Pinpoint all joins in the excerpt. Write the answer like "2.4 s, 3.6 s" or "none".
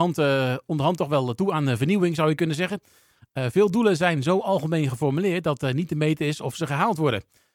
none